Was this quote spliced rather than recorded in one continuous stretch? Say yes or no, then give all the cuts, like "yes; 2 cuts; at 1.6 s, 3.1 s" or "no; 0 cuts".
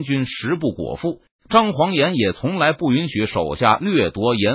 yes; 1 cut; at 1.3 s